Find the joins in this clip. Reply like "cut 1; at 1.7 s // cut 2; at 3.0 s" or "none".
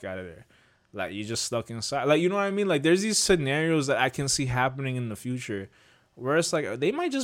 none